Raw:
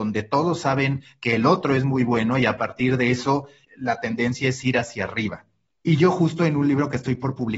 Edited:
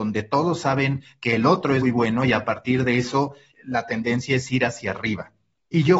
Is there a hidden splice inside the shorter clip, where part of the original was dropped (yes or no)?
yes